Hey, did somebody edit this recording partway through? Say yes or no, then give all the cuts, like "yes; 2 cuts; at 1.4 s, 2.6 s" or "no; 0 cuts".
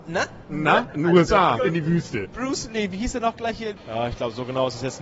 yes; 2 cuts; at 1.6 s, 3.8 s